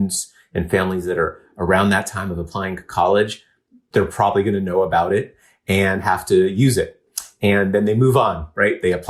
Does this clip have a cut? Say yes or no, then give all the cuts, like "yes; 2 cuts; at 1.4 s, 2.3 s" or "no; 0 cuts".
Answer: no; 0 cuts